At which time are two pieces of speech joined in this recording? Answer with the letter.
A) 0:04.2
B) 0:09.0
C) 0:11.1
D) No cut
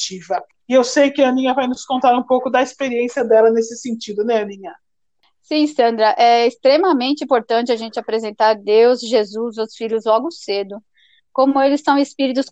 D